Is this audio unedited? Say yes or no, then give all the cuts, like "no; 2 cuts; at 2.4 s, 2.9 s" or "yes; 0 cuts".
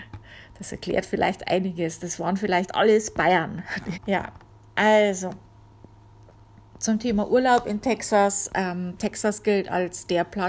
no; 1 cut; at 3.9 s